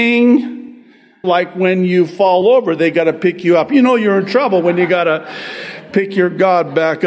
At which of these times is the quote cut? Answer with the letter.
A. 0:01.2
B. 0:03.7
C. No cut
A